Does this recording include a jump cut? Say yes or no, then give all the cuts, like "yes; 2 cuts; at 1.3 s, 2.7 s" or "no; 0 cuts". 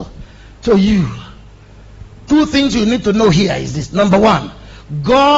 no; 0 cuts